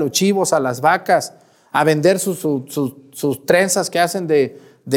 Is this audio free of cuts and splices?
yes; 0 cuts

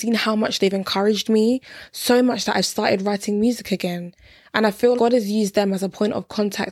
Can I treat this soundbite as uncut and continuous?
no; 1 cut; at 5.0 s

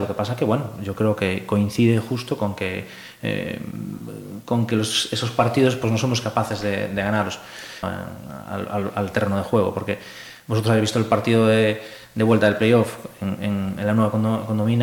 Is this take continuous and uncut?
no; 2 cuts; at 7.8 s, 13.7 s

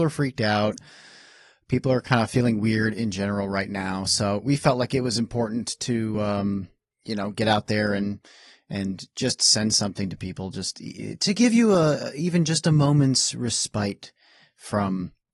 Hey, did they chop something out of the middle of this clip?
no; 0 cuts

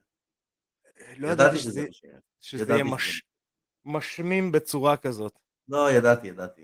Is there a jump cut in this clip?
no; 0 cuts

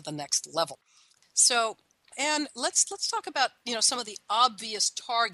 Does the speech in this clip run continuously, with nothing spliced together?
yes; 0 cuts

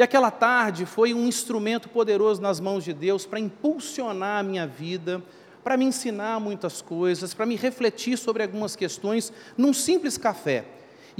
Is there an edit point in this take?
no; 0 cuts

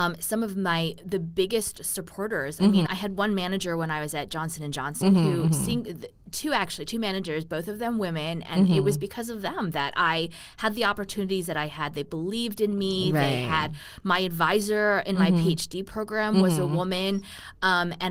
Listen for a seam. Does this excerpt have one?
yes; 1 cut; at 2.9 s

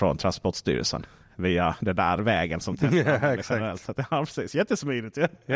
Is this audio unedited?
yes; 0 cuts

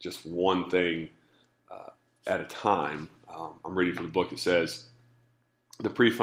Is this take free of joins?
yes; 0 cuts

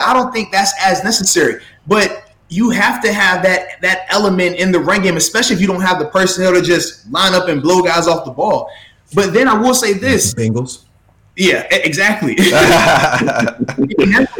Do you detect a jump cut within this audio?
no; 0 cuts

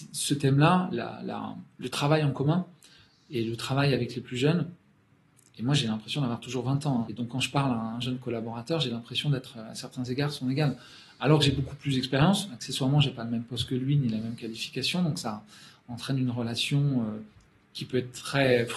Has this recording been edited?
yes; 1 cut; at 7.0 s

